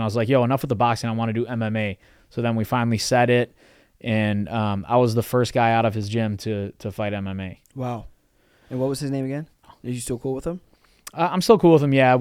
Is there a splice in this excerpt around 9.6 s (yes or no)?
yes